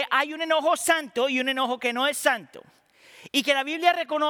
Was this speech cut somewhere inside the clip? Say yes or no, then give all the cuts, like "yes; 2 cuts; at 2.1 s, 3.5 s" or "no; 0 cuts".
no; 0 cuts